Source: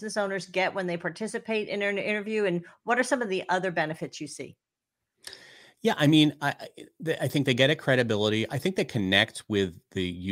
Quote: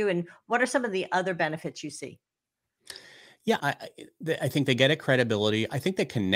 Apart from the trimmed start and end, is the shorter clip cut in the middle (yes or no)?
yes